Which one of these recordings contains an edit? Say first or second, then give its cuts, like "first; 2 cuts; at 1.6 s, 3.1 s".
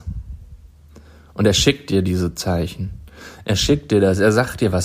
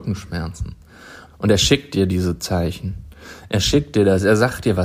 second; 1 cut; at 1.2 s